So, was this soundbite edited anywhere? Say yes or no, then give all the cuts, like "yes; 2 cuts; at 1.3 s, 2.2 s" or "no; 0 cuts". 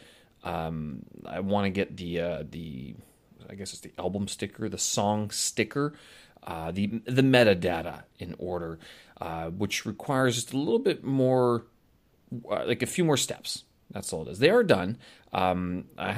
no; 0 cuts